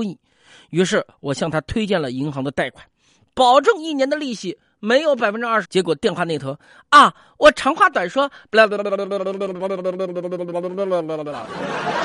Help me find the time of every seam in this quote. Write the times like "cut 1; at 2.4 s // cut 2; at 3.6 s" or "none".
cut 1; at 5.6 s